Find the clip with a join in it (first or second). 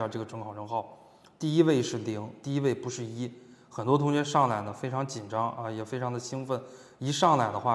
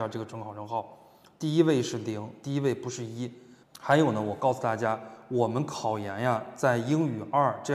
second